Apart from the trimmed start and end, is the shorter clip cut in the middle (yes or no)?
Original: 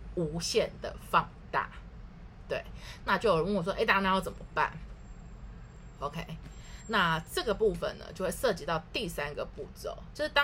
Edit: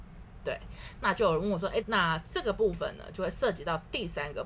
yes